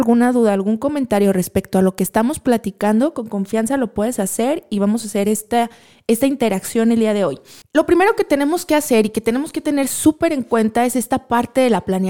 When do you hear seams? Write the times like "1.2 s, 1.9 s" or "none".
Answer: 7.6 s